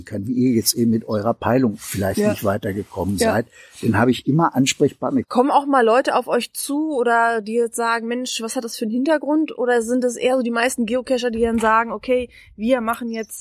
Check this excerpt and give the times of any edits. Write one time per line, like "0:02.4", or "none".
0:05.2